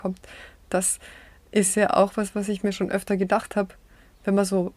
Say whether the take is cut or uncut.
uncut